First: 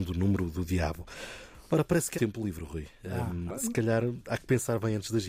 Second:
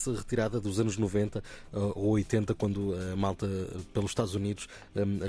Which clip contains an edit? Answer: first; 2 cuts; at 2.1 s, 3.5 s

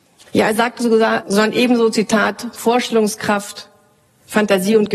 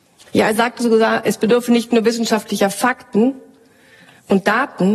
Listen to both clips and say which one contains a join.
first; 1 cut; at 1.2 s

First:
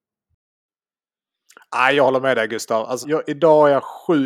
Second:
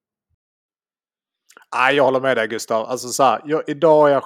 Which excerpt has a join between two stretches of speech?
first; 1 cut; at 3.0 s

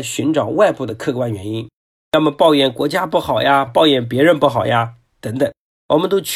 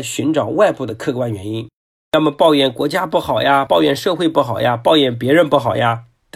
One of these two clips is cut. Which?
first; 1 cut; at 3.7 s

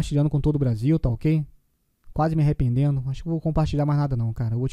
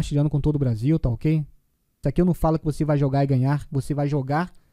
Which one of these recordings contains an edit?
second; 1 cut; at 2.0 s

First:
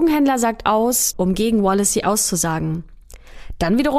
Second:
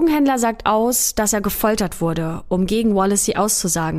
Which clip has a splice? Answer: first; 1 cut; at 1.1 s

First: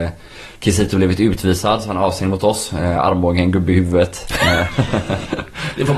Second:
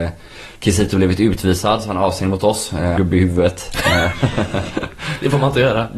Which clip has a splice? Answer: second; 1 cut; at 3.0 s

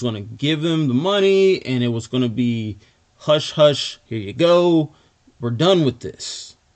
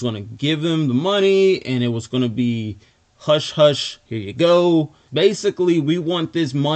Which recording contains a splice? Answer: second; 1 cut; at 5.1 s

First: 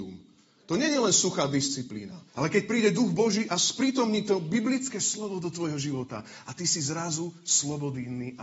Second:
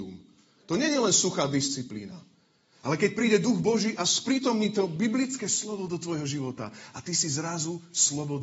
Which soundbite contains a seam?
first; 1 cut; at 2.3 s

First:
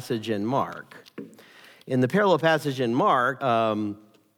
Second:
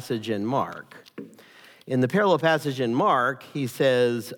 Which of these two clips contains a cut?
first; 1 cut; at 3.4 s

